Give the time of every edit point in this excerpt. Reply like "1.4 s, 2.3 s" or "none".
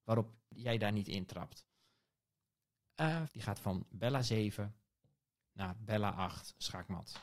3.3 s